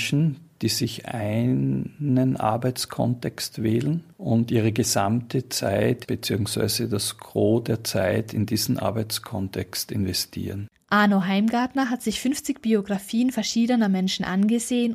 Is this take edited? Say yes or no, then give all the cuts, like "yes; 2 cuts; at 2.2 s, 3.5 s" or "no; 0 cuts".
yes; 1 cut; at 10.7 s